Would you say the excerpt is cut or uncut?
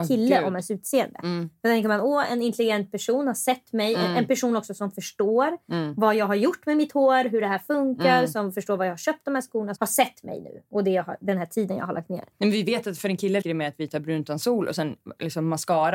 cut